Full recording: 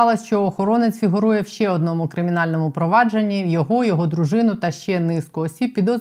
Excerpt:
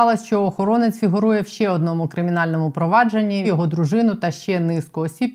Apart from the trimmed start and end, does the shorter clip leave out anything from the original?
yes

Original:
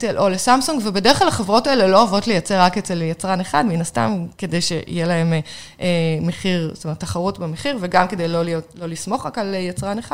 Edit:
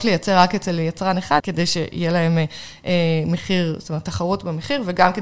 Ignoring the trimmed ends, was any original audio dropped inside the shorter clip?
yes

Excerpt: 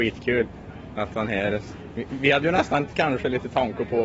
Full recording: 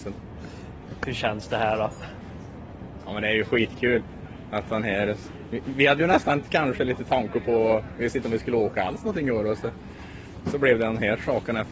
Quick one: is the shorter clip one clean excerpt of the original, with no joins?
yes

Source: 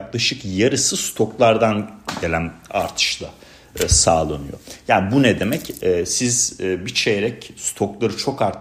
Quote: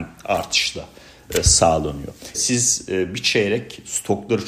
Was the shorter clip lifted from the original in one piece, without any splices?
no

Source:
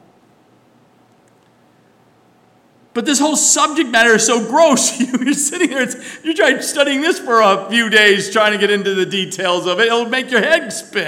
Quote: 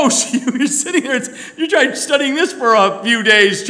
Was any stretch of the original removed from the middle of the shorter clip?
no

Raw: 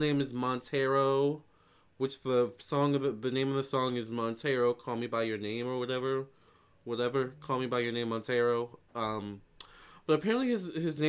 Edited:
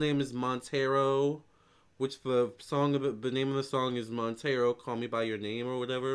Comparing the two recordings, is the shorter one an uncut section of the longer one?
yes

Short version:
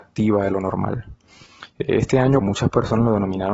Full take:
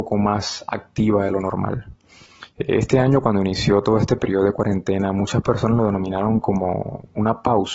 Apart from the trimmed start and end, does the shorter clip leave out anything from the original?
yes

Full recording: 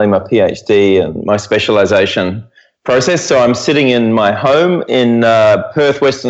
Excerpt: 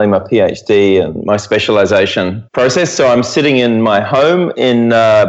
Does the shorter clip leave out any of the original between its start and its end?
yes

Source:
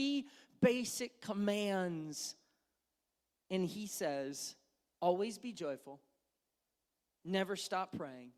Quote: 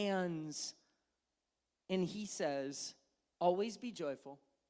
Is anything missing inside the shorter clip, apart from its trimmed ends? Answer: no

